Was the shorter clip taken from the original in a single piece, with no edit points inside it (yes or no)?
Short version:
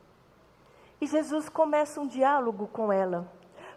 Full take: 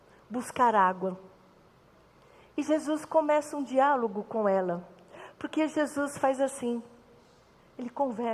yes